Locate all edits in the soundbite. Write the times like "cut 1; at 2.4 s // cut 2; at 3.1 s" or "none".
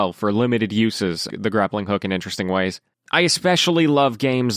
cut 1; at 1.3 s // cut 2; at 2.9 s